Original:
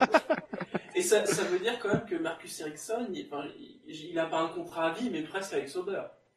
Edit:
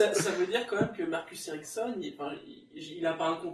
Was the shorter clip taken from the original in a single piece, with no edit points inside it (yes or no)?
yes